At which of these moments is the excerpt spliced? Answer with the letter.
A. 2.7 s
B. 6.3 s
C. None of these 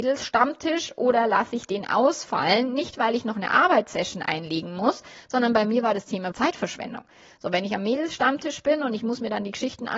B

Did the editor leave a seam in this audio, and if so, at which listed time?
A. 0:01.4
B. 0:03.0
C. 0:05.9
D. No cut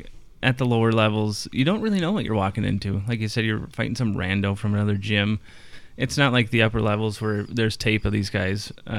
D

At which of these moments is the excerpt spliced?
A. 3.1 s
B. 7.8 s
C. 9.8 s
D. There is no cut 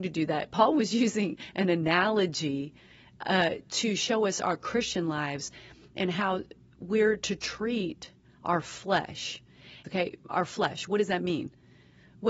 C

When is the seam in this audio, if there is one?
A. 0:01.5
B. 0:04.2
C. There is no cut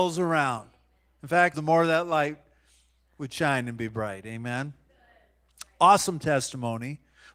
A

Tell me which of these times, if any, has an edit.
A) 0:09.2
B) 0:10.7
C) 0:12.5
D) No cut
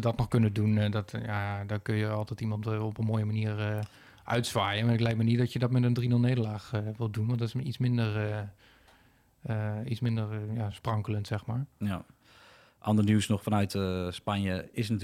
D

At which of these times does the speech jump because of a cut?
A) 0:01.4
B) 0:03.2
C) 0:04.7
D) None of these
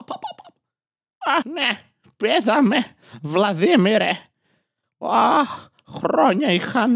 A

